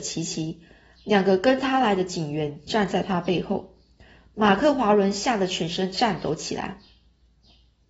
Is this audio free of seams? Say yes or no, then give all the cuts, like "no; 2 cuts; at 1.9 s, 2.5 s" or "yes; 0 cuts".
yes; 0 cuts